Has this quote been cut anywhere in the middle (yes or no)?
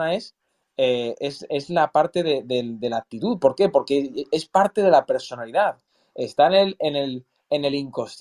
no